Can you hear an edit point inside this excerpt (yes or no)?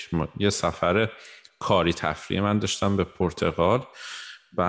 no